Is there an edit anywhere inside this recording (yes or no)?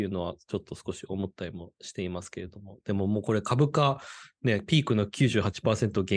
no